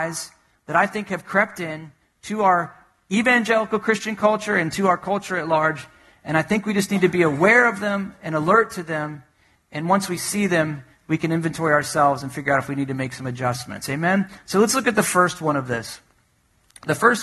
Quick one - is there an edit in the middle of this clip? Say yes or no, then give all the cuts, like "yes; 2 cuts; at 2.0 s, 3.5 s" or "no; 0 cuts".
no; 0 cuts